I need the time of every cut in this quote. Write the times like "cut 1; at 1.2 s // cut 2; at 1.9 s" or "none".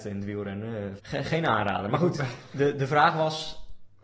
cut 1; at 1.0 s